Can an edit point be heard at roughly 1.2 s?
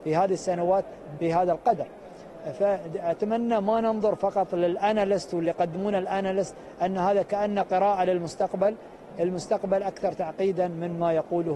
yes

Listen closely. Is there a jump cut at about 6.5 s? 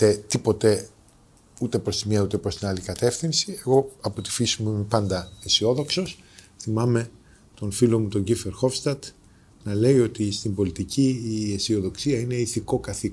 no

